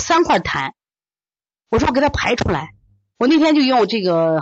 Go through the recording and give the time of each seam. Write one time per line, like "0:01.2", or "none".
none